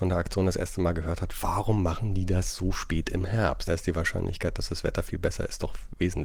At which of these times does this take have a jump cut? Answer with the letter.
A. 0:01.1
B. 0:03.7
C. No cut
B